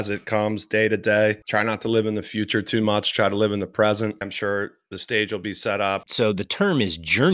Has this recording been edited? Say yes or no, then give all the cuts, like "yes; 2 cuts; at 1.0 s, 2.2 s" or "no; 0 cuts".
yes; 2 cuts; at 4.2 s, 6.0 s